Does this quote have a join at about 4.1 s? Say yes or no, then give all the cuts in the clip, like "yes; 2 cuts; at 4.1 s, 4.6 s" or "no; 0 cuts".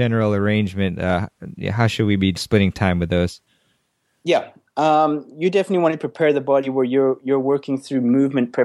no; 0 cuts